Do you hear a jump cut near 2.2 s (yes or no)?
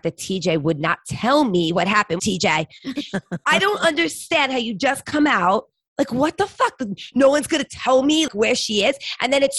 yes